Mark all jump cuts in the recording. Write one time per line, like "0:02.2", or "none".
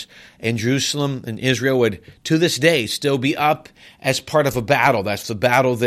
none